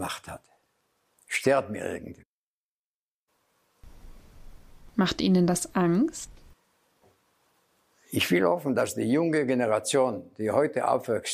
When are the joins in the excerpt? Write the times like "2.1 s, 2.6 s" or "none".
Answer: none